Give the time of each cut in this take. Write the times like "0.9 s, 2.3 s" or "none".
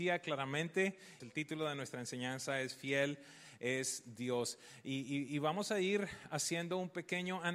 1.2 s